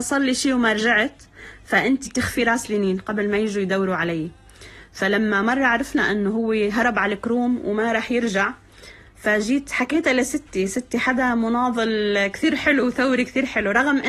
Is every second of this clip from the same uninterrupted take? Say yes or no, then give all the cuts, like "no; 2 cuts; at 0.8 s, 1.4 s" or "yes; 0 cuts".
no; 1 cut; at 2.1 s